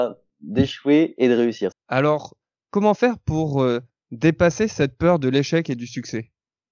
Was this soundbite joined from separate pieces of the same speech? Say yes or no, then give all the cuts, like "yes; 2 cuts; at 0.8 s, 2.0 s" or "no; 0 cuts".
yes; 1 cut; at 1.7 s